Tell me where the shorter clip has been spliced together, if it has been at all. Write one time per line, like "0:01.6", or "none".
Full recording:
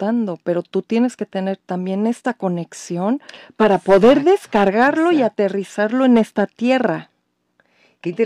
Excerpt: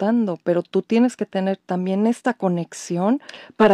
none

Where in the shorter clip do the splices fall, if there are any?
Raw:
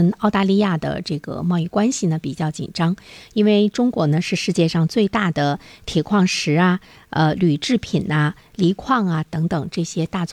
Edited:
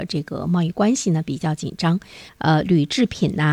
0:02.3

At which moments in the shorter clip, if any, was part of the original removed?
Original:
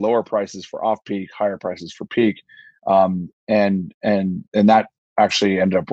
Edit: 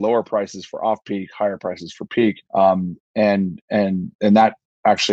0:02.5

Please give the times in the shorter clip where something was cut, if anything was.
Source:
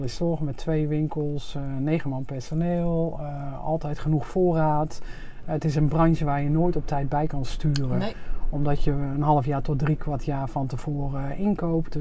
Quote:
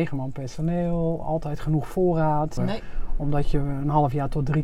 0:01.2
0:02.6

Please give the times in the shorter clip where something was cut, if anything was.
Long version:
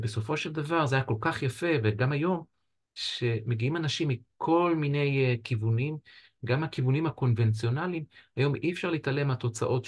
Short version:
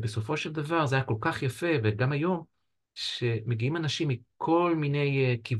none

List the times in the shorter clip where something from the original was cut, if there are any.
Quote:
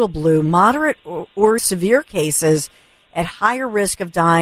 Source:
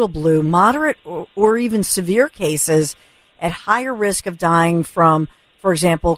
0:01.6

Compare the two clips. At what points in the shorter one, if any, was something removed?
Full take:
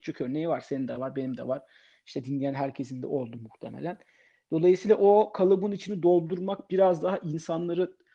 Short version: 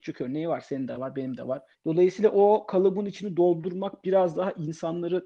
0:01.7

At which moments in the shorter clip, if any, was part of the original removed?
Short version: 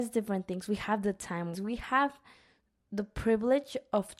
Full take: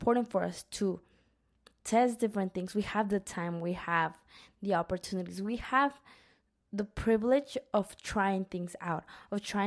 0:01.5

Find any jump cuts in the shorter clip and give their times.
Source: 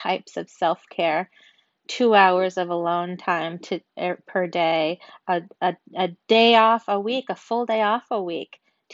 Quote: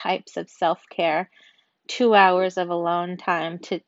none

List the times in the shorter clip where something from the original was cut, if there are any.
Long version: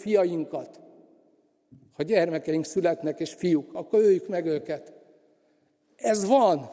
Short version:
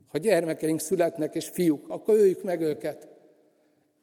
none

